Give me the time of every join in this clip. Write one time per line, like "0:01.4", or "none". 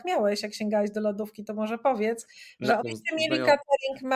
0:02.8

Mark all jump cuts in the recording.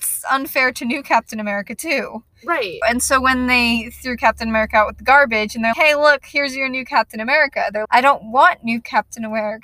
0:02.8
0:05.7
0:07.8

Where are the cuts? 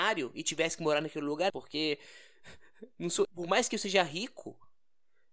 0:01.5
0:03.2

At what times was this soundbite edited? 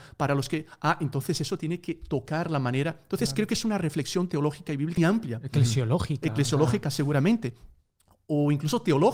0:05.0

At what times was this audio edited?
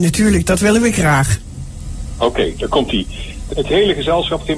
0:03.5

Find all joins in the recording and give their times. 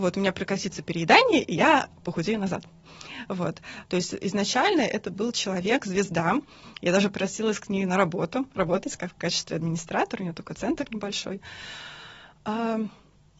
0:03.8

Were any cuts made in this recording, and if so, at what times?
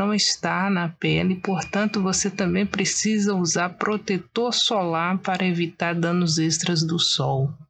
none

